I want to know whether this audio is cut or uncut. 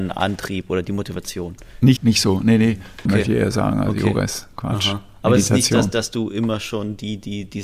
cut